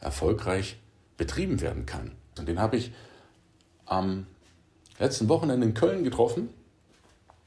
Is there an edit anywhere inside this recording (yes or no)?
yes